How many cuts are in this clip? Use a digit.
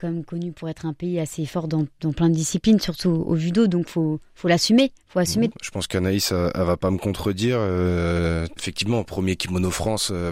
2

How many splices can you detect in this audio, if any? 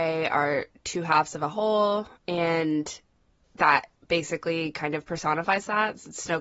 1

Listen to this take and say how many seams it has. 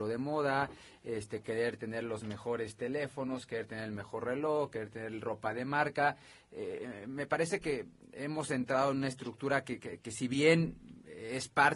0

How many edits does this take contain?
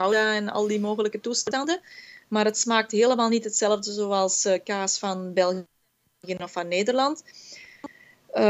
0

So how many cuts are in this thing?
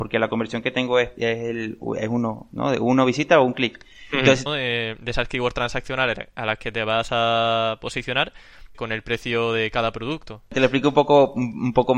2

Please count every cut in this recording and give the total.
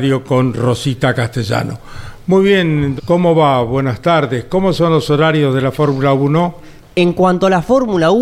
2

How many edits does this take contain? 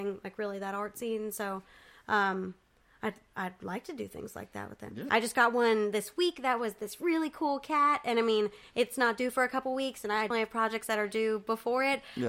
2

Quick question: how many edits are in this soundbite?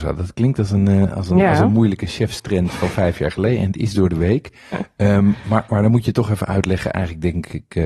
0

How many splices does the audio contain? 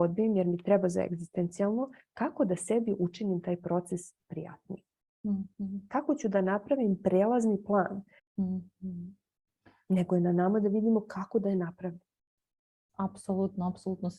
2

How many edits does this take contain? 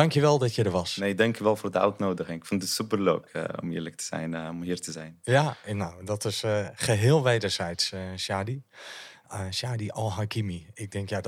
0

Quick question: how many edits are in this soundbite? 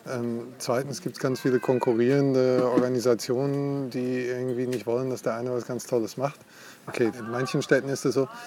1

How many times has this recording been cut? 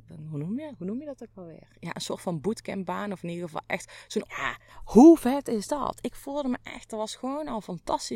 1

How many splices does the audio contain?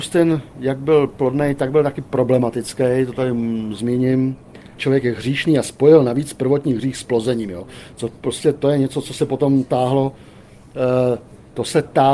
1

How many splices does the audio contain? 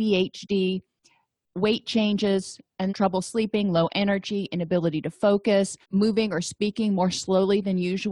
2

